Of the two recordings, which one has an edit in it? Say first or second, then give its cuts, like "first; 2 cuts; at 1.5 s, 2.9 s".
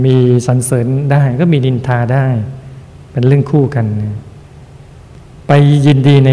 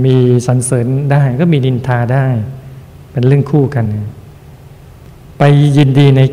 second; 1 cut; at 3.9 s